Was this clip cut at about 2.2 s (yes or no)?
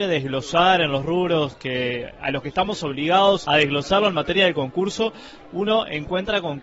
no